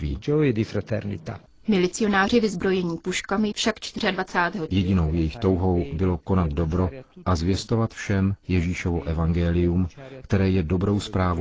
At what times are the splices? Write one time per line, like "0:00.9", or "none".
0:04.7